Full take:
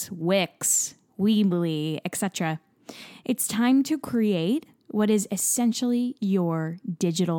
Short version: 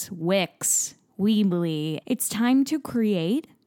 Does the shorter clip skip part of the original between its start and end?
yes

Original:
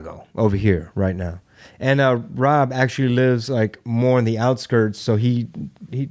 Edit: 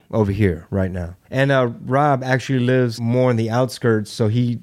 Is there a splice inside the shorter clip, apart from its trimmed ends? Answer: yes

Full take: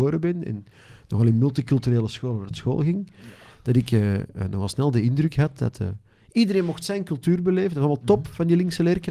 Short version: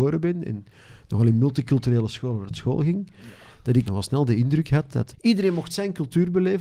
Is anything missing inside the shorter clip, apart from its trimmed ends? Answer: yes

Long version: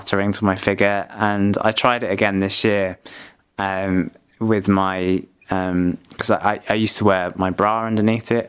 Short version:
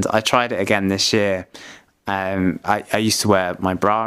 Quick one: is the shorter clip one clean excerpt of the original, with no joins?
no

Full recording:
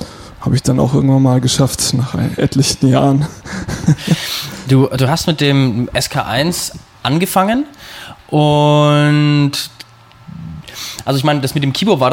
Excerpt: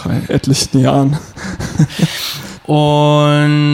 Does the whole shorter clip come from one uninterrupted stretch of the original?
no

